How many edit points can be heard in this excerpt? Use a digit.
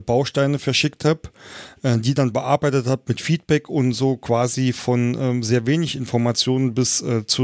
0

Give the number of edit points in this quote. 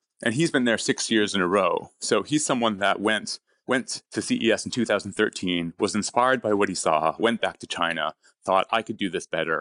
1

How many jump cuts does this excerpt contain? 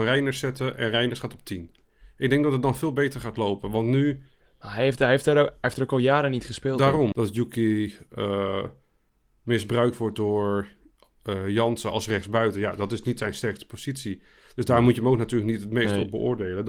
1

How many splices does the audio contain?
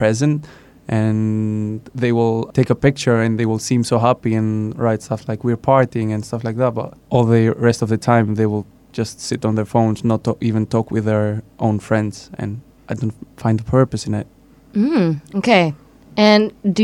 0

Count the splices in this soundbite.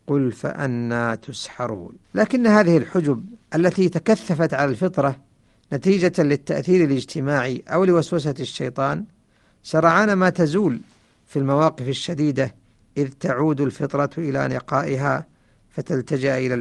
2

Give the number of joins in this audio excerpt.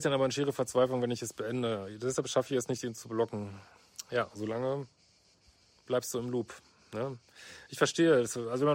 0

